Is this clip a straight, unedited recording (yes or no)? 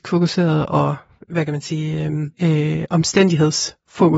no